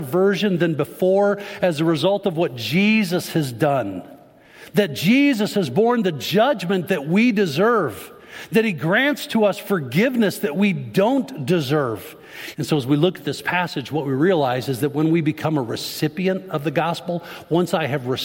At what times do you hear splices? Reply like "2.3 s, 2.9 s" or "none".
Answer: 12.5 s